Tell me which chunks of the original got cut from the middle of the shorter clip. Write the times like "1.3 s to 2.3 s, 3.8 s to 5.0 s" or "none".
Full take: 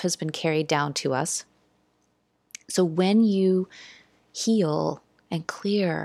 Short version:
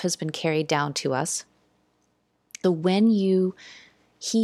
2.6 s to 2.8 s